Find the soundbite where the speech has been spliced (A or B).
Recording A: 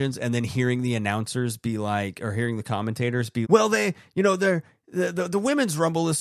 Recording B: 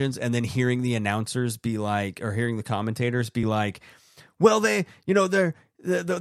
A